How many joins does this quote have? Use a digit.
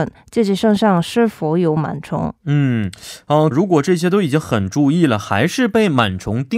1